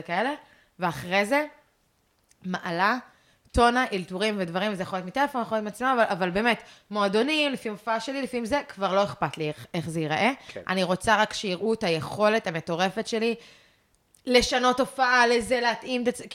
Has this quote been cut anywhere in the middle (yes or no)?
no